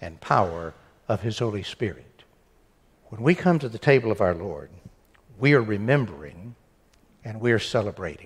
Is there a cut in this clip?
yes; 1 cut; at 3.0 s

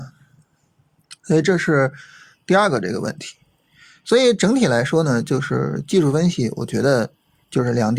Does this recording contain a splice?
no; 0 cuts

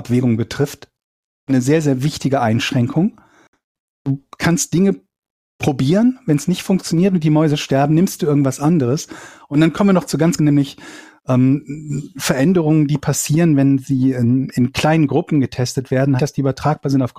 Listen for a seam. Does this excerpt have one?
yes; 2 cuts; at 10.4 s, 16.2 s

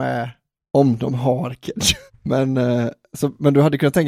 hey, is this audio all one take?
no; 1 cut; at 2.1 s

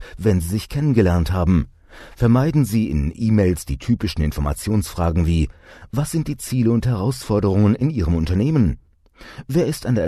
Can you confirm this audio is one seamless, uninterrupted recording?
yes; 0 cuts

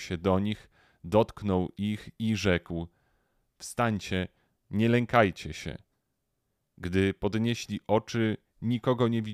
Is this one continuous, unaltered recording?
yes; 0 cuts

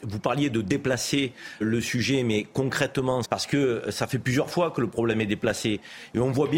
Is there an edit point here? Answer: yes; 2 cuts; at 1.6 s, 3.2 s

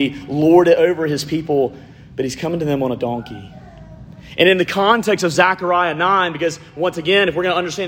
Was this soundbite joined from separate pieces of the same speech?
no; 0 cuts

